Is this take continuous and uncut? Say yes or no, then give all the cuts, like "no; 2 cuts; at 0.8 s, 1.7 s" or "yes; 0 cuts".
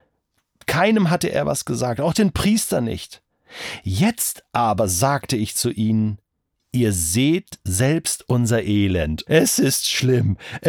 no; 1 cut; at 9.3 s